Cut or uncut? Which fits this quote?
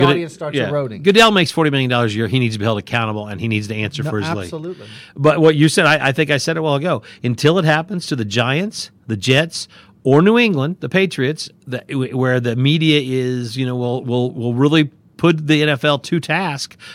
uncut